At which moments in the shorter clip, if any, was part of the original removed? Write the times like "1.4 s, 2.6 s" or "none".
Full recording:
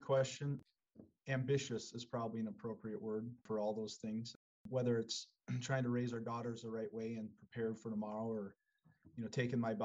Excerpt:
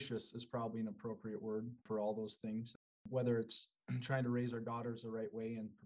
none